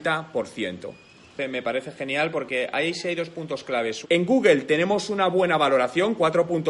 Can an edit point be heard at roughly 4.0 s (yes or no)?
yes